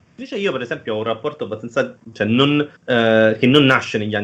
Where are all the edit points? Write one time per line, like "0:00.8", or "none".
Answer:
0:02.8